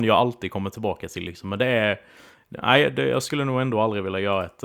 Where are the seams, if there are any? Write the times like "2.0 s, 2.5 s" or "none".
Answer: none